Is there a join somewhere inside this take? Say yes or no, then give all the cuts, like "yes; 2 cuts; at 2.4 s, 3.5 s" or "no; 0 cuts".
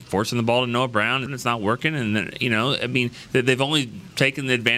yes; 1 cut; at 1.3 s